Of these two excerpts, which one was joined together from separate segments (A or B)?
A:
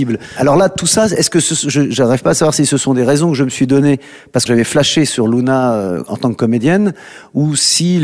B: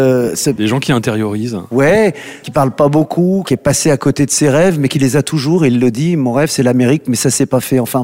A